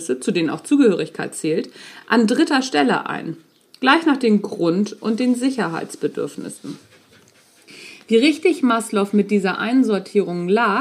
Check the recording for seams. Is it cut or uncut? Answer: uncut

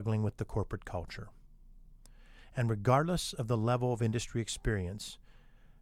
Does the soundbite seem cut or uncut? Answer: uncut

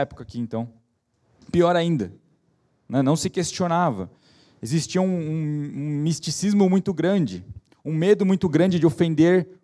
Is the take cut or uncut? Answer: uncut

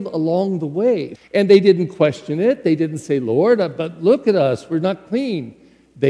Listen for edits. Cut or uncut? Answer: cut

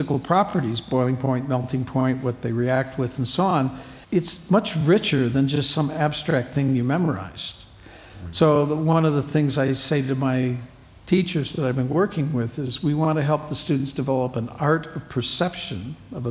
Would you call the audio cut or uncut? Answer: cut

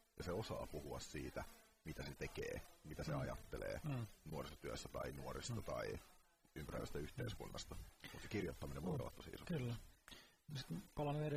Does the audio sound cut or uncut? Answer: uncut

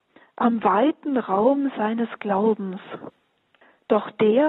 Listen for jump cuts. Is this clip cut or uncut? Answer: uncut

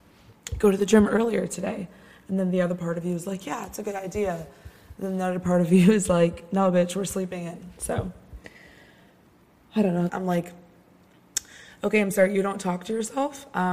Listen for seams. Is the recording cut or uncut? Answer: cut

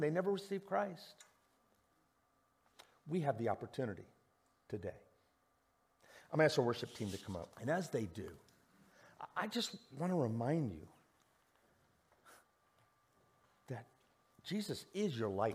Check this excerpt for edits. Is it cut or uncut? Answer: cut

